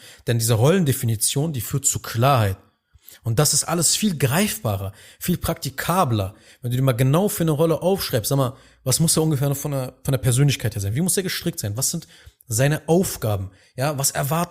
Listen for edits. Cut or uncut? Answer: uncut